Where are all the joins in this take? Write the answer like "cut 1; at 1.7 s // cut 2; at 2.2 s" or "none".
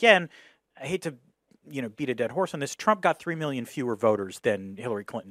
cut 1; at 4.4 s